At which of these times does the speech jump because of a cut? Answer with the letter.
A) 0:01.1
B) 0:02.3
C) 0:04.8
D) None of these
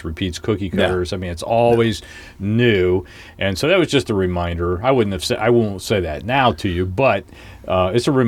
D